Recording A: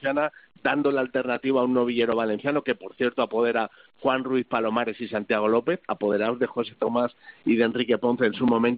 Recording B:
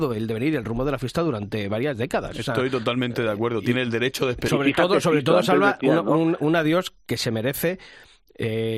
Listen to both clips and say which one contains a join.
B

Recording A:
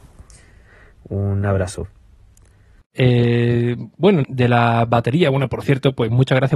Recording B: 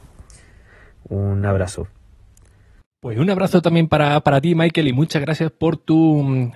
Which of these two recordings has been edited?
A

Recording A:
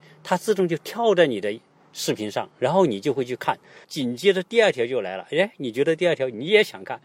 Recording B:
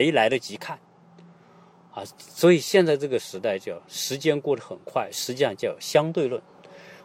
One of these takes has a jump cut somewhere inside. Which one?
A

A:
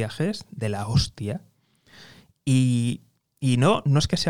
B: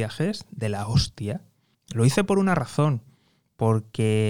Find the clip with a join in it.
B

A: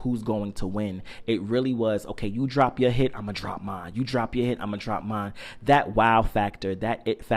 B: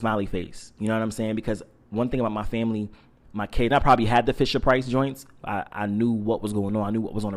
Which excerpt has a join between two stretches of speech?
B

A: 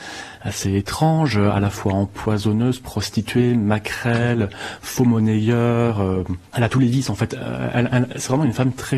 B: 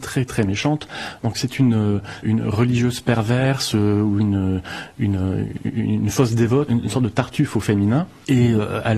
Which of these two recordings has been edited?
B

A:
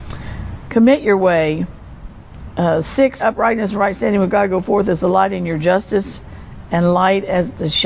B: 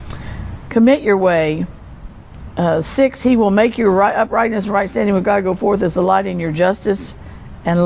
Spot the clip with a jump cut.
A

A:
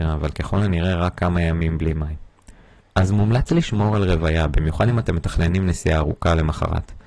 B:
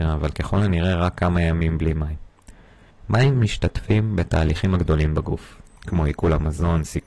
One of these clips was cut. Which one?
A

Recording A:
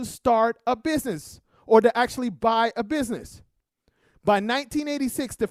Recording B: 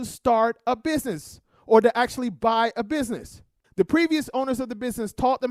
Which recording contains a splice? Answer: B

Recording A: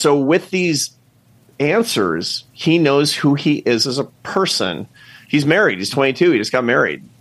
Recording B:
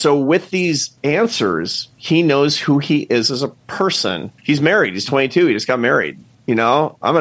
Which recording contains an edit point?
B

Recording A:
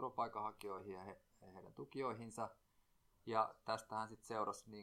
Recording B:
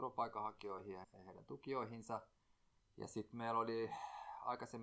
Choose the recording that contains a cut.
B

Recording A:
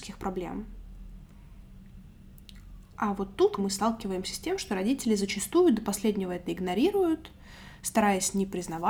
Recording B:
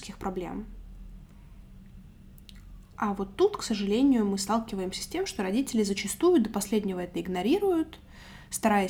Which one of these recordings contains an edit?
A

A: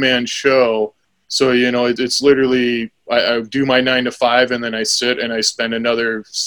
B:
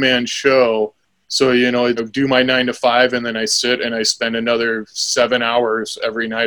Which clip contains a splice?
B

